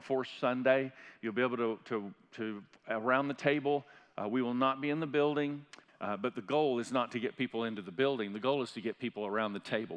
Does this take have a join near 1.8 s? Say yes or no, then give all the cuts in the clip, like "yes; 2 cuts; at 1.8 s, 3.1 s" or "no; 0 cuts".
no; 1 cut; at 5.9 s